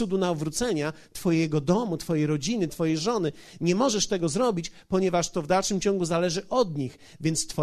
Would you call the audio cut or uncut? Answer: cut